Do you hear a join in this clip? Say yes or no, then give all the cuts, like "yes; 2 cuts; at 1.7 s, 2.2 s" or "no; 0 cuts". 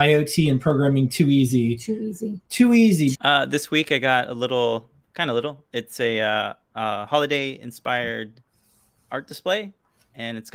yes; 1 cut; at 3.1 s